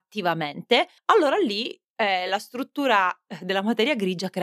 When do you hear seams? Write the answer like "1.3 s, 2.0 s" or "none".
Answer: none